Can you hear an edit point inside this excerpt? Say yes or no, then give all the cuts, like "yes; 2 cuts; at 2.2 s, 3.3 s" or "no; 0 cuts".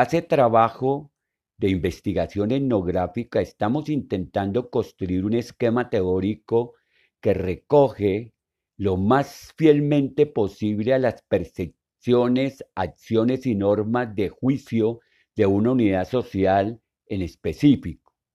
no; 0 cuts